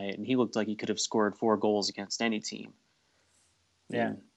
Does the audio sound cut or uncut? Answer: uncut